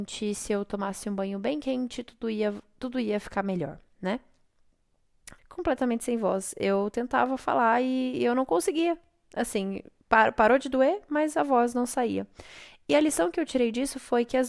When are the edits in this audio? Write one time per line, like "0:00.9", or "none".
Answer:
0:05.4